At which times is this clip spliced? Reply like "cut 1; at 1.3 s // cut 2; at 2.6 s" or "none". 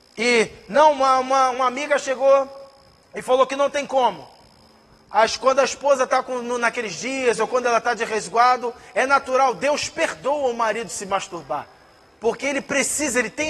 none